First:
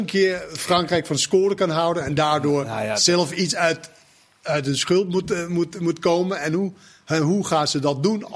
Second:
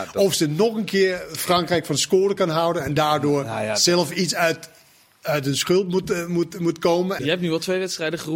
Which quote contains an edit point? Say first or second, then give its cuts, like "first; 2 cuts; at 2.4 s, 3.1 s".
second; 1 cut; at 7.2 s